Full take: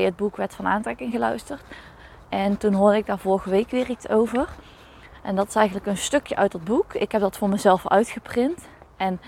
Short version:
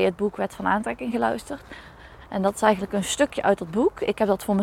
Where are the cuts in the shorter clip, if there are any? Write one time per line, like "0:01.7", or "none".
0:02.2